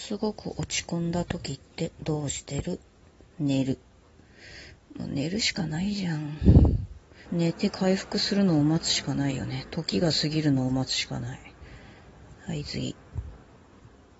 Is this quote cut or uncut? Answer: cut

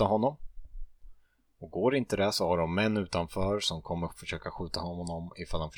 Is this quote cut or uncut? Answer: uncut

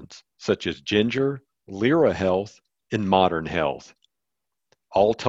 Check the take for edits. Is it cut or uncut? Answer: uncut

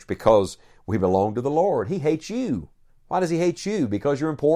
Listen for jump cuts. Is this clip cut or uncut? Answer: uncut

